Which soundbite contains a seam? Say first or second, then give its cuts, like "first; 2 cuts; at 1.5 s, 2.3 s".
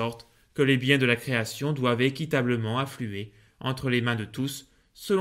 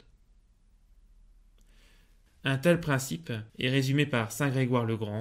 second; 2 cuts; at 2.3 s, 3.5 s